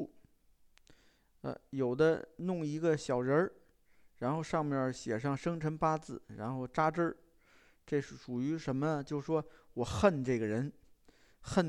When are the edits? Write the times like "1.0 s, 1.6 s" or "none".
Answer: none

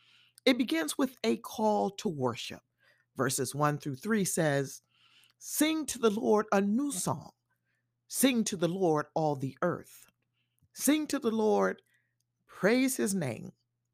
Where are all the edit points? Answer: none

